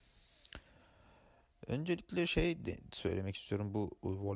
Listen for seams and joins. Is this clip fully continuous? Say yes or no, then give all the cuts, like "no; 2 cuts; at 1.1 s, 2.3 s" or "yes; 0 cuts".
yes; 0 cuts